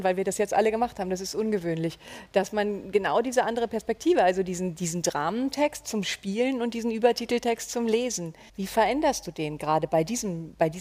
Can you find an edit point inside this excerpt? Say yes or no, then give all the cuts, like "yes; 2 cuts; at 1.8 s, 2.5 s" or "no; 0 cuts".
yes; 1 cut; at 8.5 s